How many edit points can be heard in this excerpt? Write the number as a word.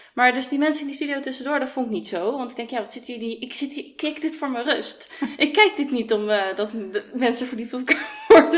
zero